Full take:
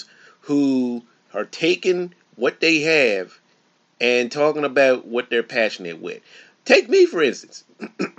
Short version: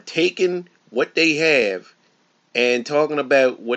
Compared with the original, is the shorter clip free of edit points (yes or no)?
yes